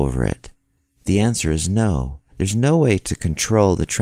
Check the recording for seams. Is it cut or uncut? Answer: uncut